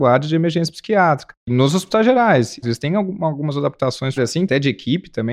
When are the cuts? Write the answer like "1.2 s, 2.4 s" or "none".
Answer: 2.6 s, 4.2 s